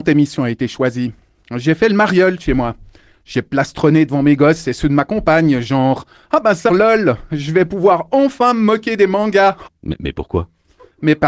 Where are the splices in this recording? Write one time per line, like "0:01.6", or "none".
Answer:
0:06.7
0:09.7